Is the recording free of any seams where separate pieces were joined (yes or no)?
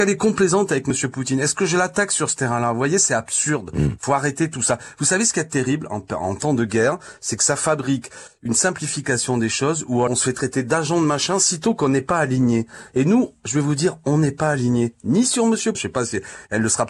no